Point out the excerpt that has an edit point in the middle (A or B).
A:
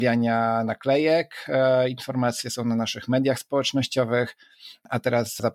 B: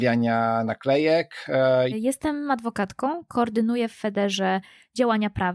B